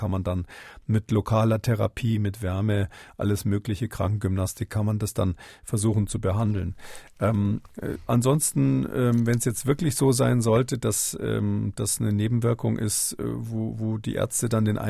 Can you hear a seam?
no; 0 cuts

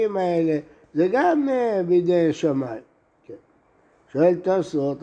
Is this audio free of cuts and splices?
yes; 0 cuts

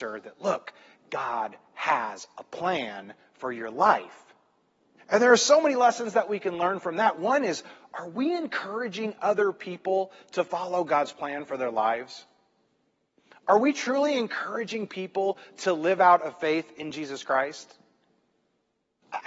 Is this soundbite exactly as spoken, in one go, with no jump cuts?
no; 1 cut; at 5.0 s

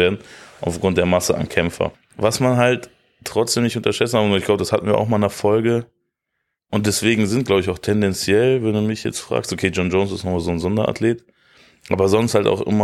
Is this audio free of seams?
no; 1 cut; at 1.9 s

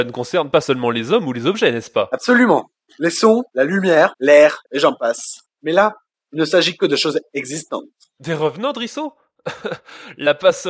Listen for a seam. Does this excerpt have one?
yes; 2 cuts; at 4.6 s, 8.2 s

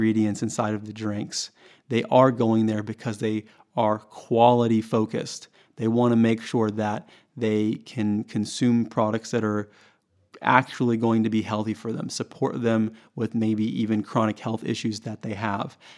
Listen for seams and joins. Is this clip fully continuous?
yes; 0 cuts

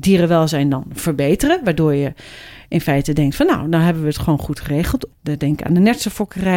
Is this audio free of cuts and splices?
no; 1 cut; at 5.1 s

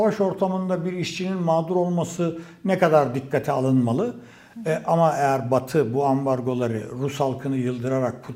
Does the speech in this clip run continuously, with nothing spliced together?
yes; 0 cuts

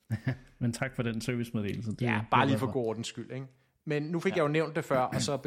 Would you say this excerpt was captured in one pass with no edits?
yes; 0 cuts

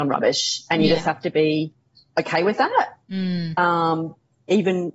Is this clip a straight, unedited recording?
yes; 0 cuts

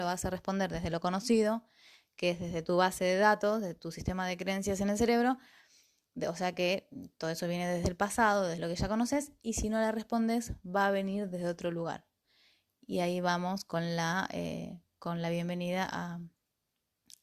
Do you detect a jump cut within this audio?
no; 0 cuts

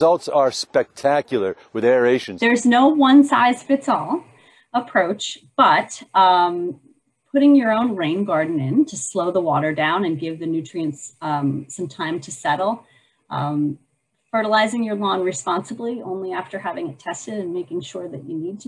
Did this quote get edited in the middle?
yes; 1 cut; at 2.4 s

